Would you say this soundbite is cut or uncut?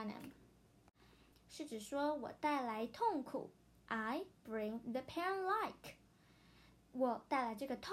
cut